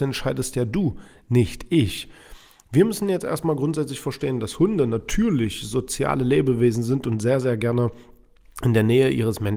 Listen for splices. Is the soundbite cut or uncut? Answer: uncut